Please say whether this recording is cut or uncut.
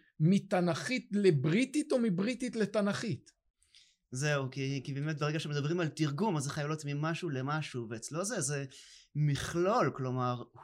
uncut